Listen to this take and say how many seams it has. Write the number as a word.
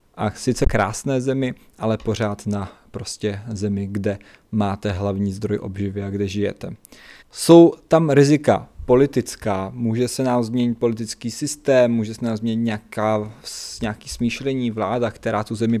one